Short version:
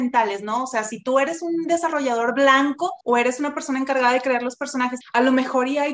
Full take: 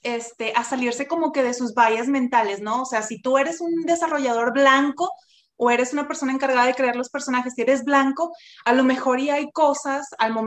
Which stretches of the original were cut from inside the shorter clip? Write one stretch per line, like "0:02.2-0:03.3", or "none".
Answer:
0:05.2-0:05.5
0:07.5-0:08.5